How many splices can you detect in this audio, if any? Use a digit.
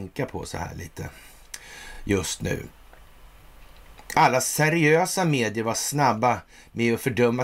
0